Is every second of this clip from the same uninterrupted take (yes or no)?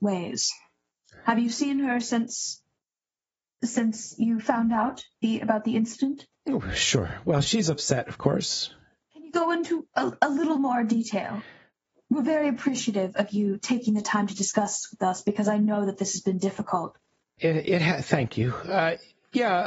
yes